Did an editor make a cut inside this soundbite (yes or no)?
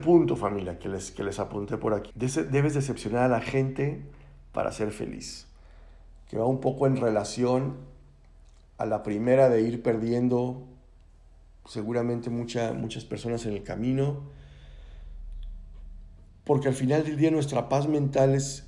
yes